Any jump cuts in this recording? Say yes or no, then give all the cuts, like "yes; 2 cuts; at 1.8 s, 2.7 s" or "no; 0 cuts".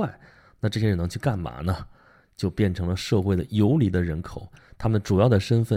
no; 0 cuts